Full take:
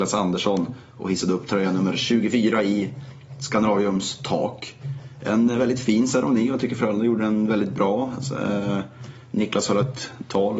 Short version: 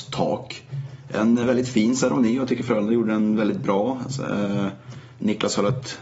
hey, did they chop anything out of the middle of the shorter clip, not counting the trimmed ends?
no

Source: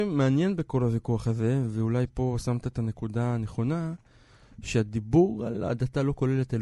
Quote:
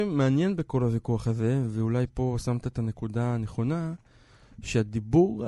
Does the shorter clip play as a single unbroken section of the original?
yes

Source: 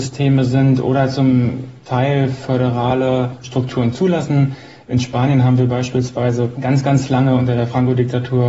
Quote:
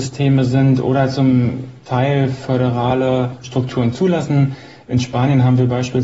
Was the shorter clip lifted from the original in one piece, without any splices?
yes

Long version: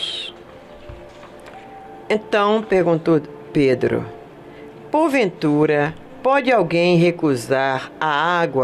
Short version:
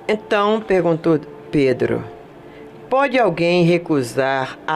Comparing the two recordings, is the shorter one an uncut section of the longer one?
no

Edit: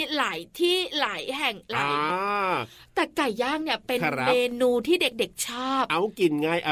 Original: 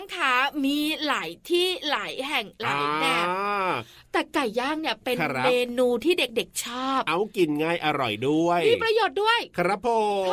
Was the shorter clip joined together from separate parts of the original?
yes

